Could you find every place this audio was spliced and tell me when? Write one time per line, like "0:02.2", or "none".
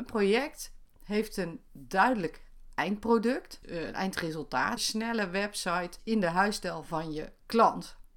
0:03.6
0:04.8